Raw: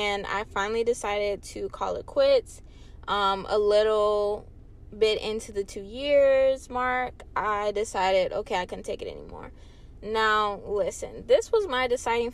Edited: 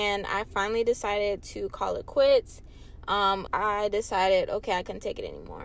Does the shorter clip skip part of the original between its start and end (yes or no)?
yes